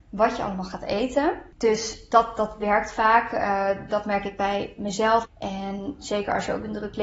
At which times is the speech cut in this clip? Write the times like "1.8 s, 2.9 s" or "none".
3.9 s, 5.3 s